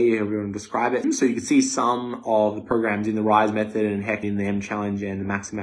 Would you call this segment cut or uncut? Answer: cut